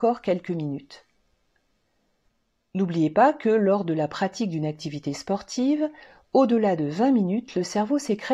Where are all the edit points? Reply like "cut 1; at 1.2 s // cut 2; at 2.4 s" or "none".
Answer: cut 1; at 2.7 s